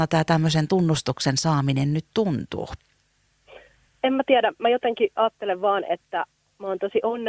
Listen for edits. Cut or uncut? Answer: cut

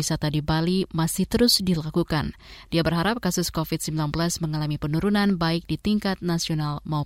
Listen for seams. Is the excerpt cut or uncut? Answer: uncut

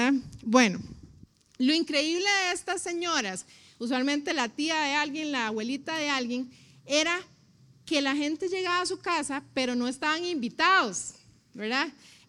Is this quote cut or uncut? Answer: uncut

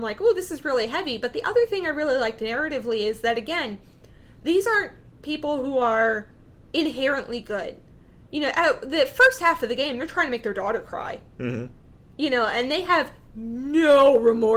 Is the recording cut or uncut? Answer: uncut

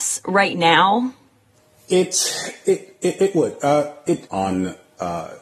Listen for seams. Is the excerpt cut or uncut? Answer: cut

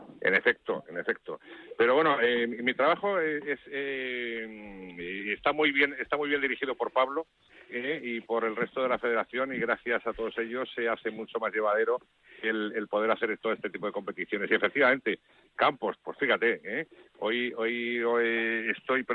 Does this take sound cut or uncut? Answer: uncut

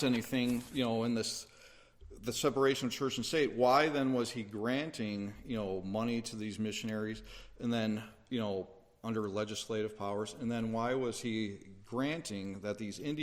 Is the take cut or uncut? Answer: uncut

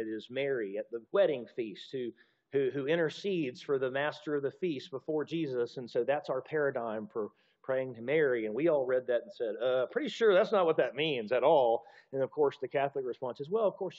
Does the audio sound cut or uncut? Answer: cut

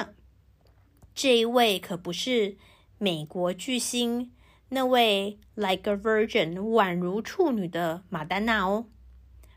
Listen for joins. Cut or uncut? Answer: uncut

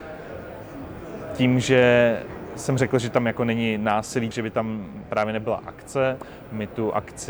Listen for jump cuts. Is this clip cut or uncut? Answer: cut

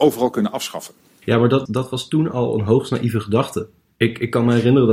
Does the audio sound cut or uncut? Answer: cut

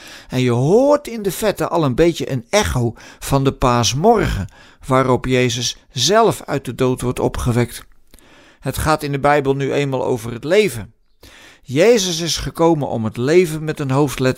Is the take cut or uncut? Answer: uncut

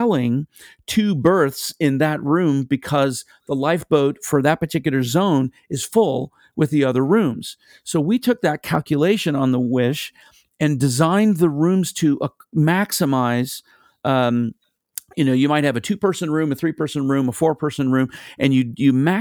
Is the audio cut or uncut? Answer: uncut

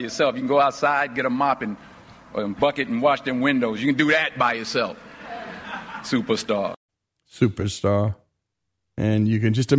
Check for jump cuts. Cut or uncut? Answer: uncut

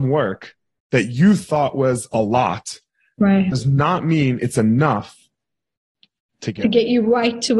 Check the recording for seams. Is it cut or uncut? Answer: uncut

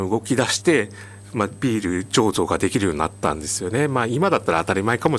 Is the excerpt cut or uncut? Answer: uncut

